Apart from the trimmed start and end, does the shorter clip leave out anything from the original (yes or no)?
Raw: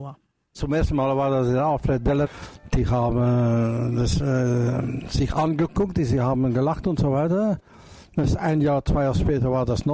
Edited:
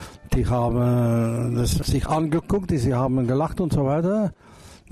yes